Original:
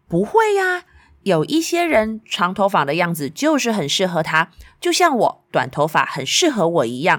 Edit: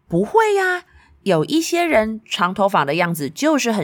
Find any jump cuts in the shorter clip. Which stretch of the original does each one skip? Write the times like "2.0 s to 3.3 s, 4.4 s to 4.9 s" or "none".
none